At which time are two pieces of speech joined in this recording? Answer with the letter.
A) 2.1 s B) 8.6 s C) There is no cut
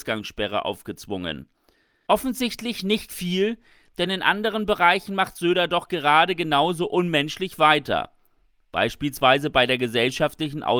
A